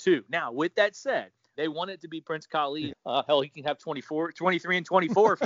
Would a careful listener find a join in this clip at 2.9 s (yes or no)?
yes